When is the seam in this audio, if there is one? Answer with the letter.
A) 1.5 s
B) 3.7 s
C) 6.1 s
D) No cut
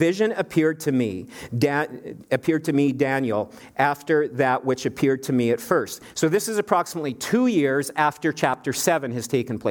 D